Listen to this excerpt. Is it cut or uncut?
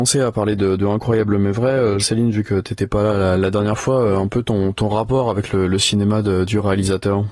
cut